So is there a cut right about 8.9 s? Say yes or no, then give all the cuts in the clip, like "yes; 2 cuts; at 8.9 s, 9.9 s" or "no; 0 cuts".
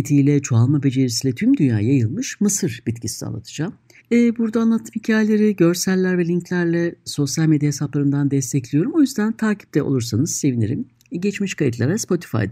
no; 1 cut; at 4.0 s